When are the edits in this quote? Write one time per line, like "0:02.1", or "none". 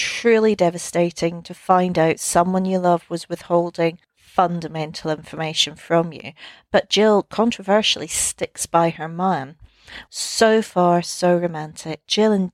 0:04.0
0:10.1